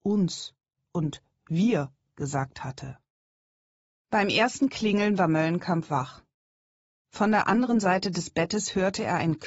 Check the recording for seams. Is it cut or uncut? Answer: cut